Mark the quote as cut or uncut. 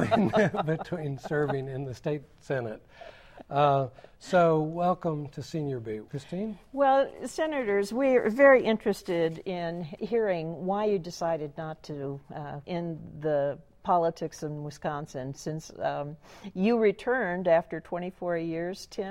cut